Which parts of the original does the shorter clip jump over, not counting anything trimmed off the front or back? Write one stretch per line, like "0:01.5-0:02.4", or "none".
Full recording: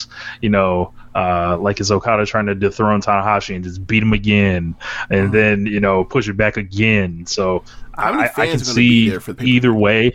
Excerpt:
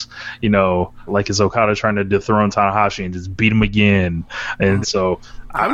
0:01.1-0:01.6
0:05.3-0:07.2

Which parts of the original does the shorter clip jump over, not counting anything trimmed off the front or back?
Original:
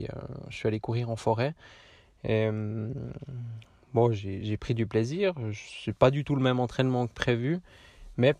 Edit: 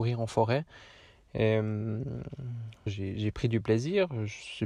0:03.8-0:04.1

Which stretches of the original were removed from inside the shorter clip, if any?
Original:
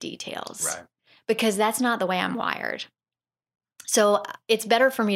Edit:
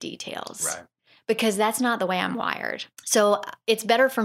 0:02.9-0:03.7

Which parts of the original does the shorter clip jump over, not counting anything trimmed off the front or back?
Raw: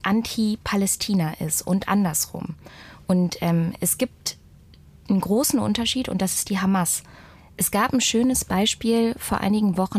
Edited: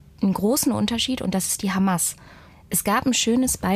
none

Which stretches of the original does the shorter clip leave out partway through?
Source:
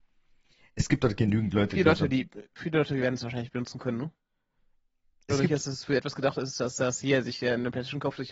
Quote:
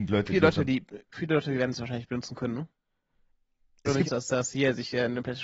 0:05.5-0:06.5

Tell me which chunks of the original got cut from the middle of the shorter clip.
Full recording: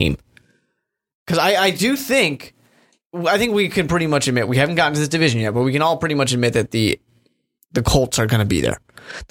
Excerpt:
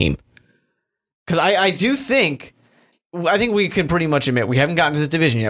none

